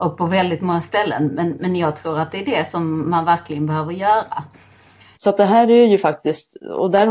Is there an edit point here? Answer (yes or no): yes